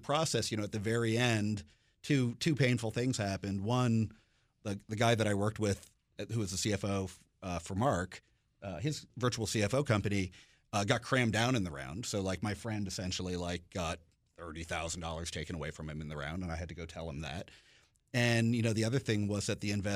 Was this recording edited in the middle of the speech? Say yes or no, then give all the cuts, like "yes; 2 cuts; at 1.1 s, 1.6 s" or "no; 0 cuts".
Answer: no; 0 cuts